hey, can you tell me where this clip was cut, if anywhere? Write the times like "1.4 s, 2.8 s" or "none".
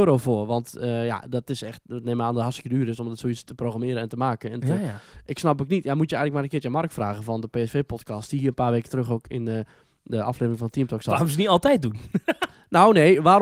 none